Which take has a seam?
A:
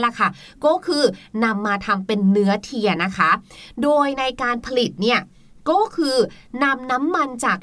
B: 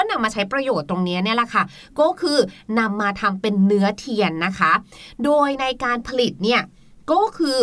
A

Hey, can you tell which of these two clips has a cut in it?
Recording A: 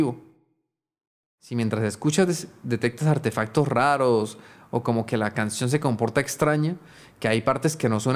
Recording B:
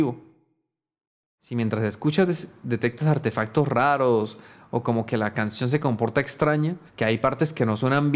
B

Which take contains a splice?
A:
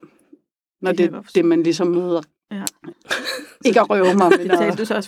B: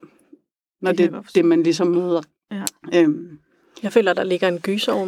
A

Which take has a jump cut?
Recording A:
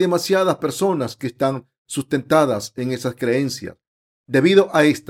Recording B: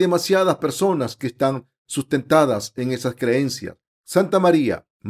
B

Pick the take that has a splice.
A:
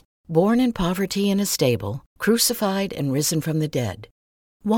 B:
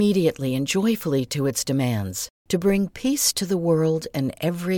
B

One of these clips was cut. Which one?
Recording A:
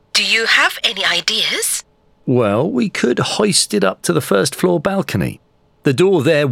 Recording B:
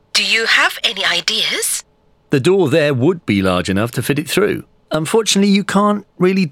B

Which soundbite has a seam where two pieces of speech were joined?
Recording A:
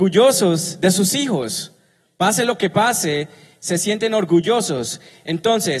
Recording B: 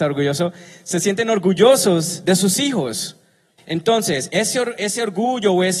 B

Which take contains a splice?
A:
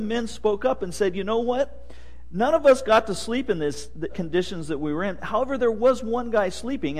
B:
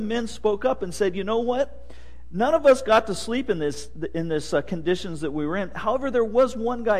A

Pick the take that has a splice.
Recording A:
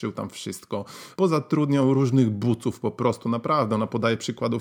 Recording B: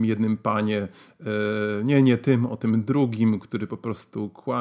A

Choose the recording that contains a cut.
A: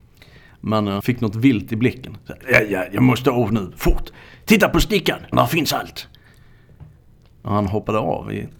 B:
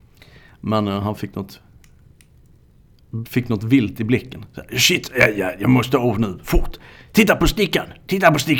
A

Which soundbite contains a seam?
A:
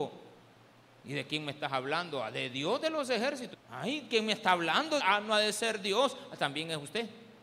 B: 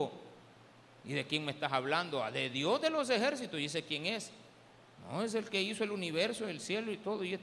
A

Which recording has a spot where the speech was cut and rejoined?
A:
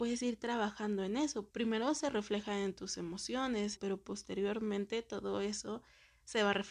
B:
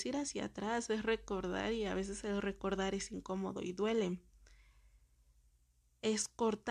A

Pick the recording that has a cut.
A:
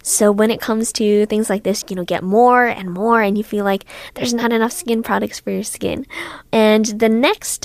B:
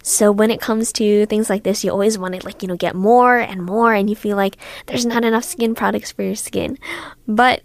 A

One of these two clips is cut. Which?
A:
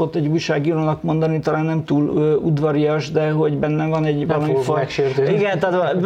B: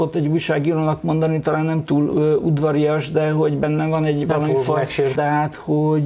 B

